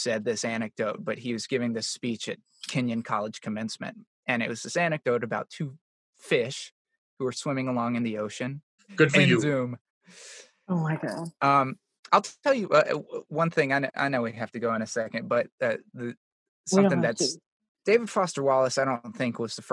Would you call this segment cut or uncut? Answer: cut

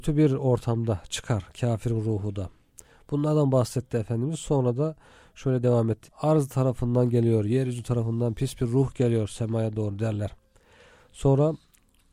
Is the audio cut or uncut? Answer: cut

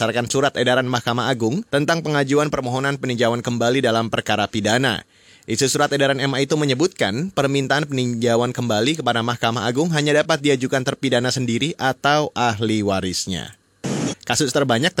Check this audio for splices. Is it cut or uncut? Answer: cut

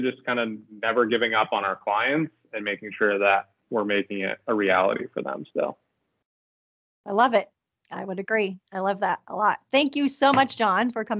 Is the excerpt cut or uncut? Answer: uncut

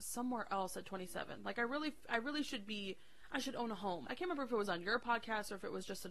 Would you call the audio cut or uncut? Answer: cut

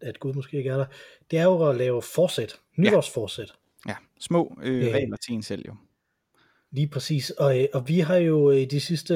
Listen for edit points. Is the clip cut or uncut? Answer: uncut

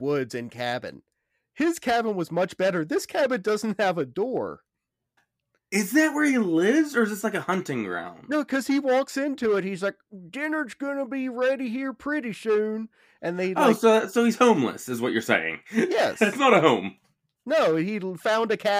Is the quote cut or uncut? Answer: uncut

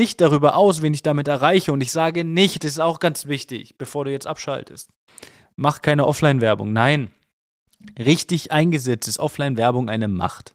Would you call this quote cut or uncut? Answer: uncut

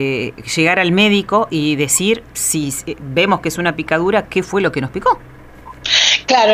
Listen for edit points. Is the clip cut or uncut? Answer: cut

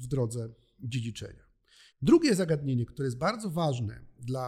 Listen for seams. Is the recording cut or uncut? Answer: cut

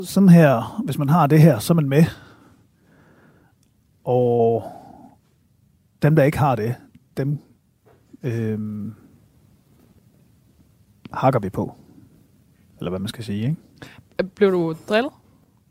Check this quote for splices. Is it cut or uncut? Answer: uncut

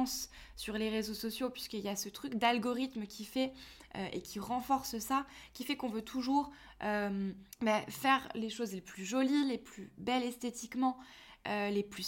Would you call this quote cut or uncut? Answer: cut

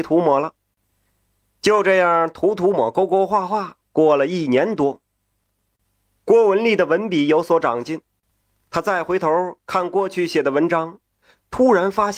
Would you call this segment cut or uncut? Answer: cut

